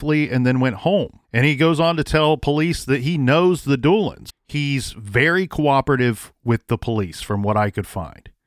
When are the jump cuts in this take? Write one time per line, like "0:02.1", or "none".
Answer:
0:01.2
0:04.3